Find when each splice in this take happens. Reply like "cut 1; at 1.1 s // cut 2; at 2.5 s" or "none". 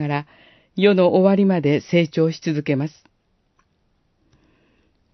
none